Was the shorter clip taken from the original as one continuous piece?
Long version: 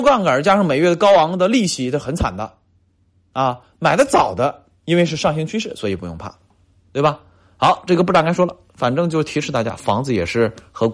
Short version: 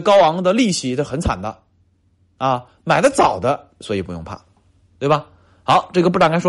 no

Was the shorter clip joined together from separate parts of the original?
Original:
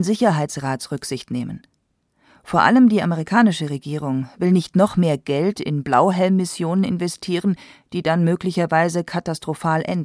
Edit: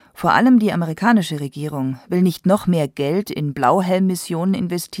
no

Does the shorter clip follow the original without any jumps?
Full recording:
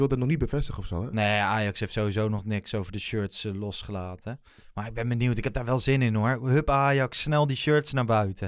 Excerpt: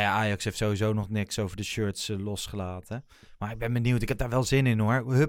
yes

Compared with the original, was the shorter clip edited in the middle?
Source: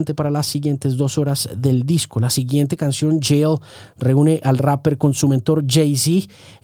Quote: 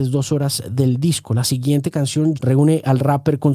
yes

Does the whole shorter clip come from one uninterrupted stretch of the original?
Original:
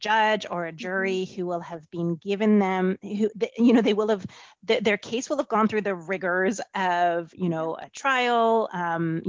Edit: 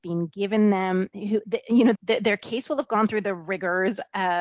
no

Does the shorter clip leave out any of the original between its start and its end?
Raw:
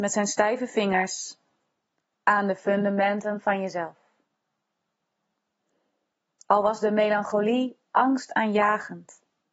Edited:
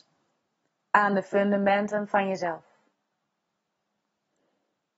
no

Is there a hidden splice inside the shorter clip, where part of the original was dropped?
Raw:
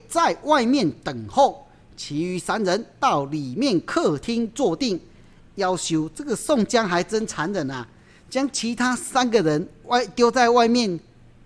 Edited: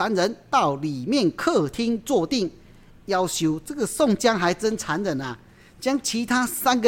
no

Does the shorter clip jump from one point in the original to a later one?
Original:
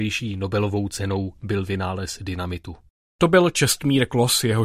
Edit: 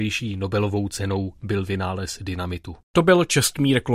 yes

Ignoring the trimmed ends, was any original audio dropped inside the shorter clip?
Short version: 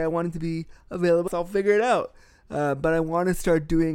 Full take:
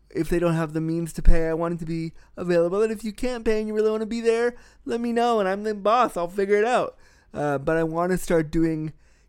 yes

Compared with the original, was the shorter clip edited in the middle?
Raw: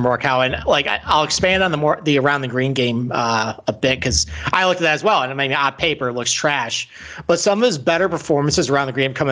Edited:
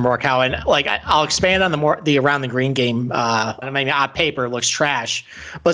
yes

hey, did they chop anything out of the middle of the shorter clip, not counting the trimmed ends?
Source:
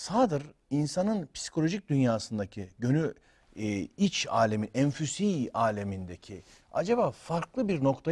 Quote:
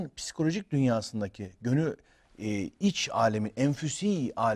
no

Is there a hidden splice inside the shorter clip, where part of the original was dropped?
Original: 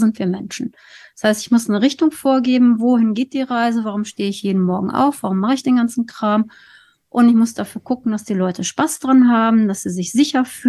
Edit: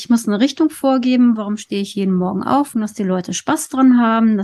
yes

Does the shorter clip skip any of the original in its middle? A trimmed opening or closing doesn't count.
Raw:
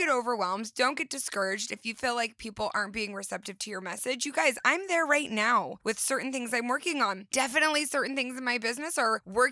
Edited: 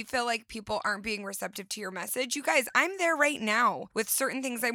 no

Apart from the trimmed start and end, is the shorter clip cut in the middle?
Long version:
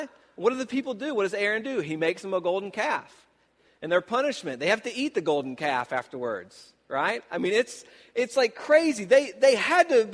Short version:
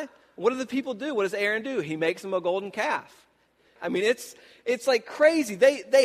yes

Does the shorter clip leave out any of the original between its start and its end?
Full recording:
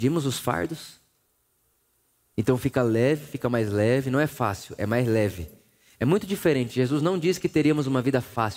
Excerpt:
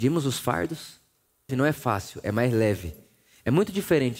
yes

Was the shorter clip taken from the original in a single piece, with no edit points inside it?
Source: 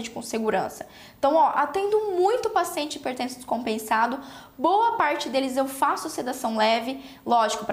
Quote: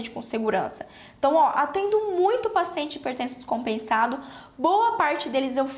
yes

